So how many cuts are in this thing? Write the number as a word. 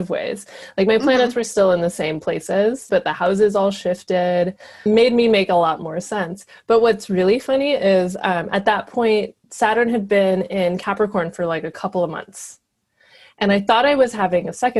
three